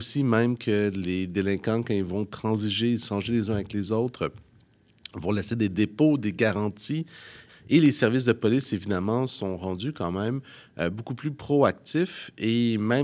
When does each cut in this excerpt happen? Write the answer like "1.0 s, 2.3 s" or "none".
7.5 s